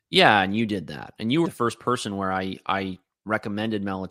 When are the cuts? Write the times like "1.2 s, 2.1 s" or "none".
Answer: 1.4 s